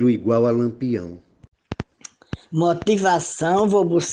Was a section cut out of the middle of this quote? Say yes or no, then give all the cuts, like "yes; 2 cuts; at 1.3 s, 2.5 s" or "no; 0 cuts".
yes; 1 cut; at 2.4 s